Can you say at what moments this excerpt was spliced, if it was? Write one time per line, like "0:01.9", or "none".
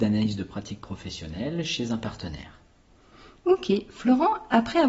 none

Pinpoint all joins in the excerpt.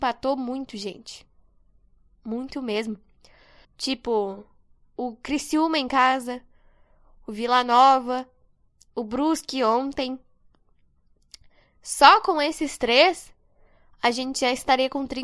0:03.6

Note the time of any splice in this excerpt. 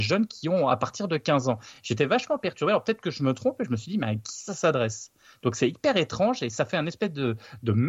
none

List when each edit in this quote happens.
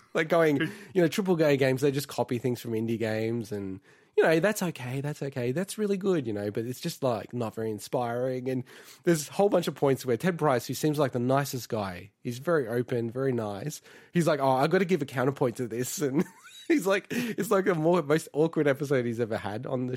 none

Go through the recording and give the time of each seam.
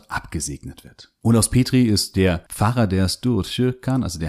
0:01.2

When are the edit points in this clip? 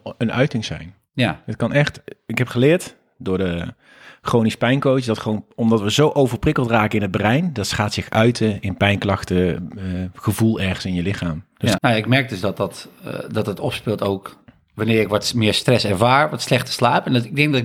0:11.8

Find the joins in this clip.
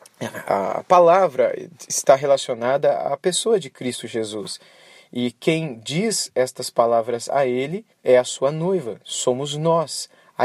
0:07.9

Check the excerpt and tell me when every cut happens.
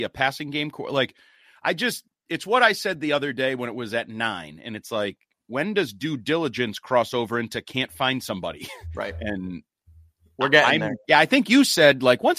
0:11.0

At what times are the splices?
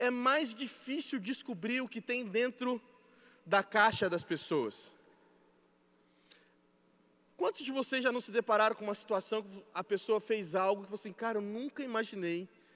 none

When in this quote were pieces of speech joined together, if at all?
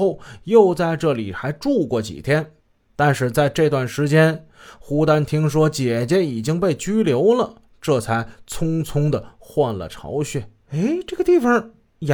0:10.6

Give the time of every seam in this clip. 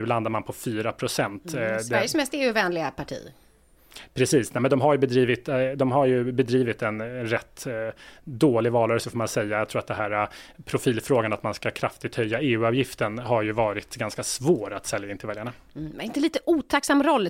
none

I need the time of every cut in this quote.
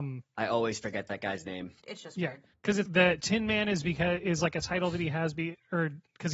0:01.8
0:02.9

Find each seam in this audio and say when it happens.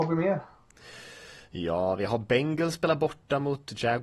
none

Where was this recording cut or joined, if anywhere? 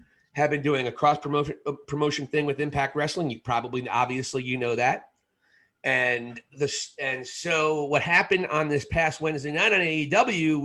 none

